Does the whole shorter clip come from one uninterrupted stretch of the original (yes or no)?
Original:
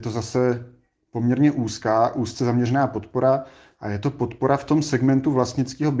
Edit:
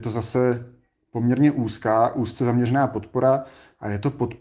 yes